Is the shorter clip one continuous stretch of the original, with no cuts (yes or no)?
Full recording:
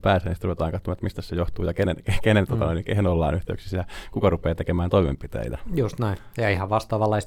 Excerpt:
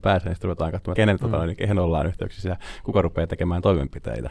no